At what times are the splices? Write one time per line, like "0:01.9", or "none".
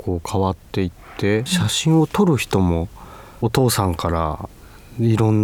0:01.5